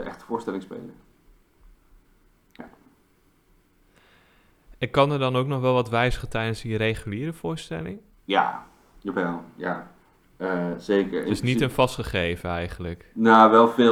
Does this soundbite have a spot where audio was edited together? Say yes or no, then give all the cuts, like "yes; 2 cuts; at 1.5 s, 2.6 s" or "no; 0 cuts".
no; 0 cuts